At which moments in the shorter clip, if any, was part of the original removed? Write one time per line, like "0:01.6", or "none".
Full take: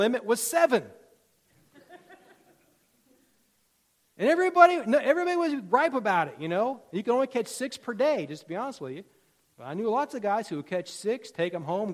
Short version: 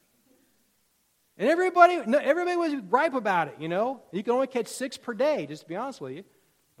none